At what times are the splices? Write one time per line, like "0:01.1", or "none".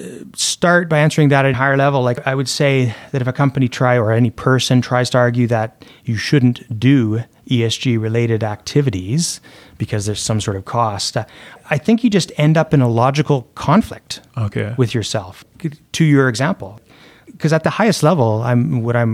0:01.5